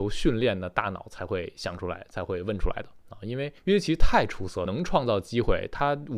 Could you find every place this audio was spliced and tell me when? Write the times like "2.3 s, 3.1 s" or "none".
3.6 s, 4.7 s